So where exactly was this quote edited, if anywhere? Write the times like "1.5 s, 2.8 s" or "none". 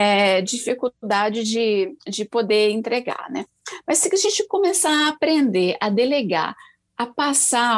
none